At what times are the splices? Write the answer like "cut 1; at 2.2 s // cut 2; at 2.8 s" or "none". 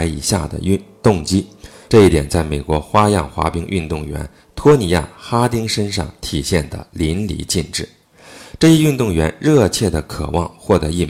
cut 1; at 1.9 s